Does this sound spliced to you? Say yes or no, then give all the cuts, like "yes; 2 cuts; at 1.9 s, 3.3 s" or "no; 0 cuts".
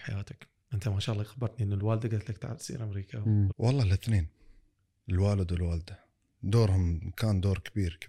yes; 1 cut; at 3.5 s